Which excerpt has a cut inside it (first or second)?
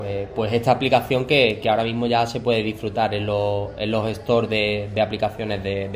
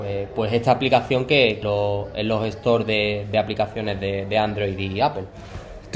second